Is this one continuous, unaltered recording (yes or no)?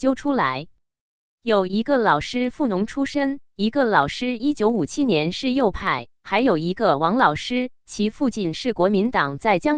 yes